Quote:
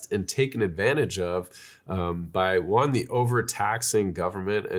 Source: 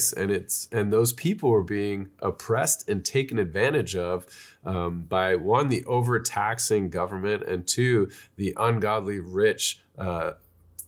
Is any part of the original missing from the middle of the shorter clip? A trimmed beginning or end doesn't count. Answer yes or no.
no